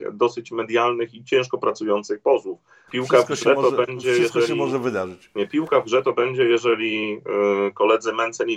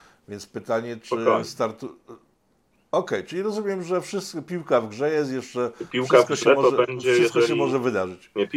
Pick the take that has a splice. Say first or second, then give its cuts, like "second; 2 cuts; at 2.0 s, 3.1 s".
first; 1 cut; at 2.9 s